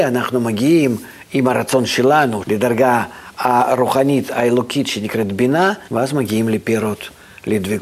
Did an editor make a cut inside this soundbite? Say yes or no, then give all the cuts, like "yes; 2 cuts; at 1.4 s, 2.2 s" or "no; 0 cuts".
yes; 2 cuts; at 2.4 s, 5.9 s